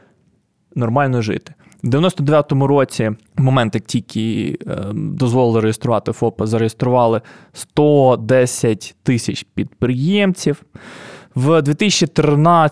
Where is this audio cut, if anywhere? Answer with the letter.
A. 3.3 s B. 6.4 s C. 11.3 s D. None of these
A